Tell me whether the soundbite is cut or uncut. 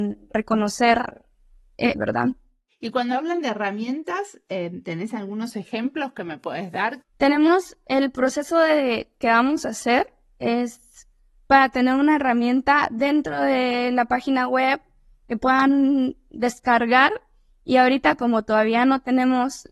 cut